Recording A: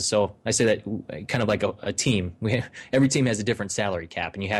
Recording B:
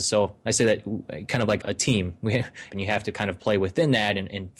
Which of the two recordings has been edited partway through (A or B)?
B